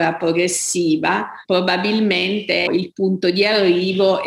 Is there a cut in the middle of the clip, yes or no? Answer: yes